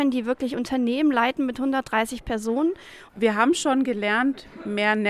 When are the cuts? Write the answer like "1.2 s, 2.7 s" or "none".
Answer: 3.1 s